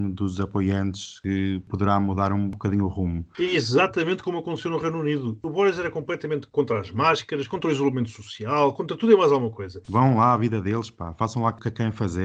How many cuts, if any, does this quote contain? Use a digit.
1